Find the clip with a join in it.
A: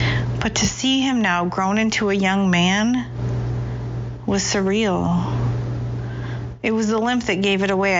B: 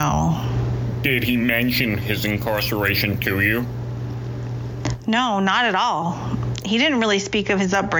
A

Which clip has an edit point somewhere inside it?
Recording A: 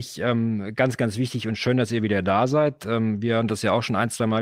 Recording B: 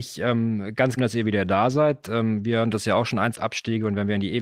B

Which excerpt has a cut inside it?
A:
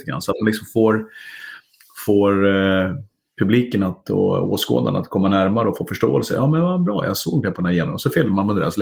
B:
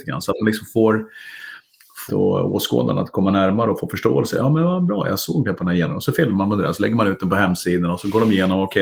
B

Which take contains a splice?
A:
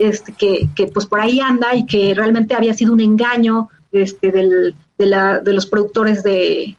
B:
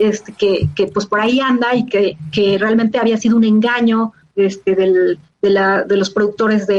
A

